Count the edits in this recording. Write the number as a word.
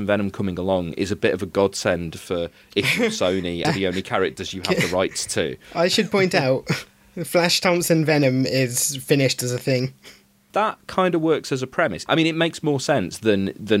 three